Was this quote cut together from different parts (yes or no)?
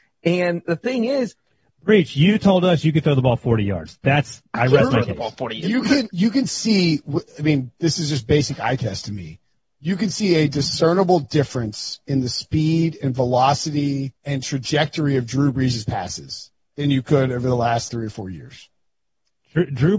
yes